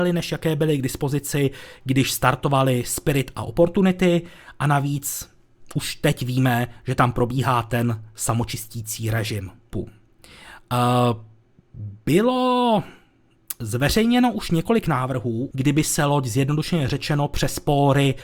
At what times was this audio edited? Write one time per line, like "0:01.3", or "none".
0:09.7
0:15.5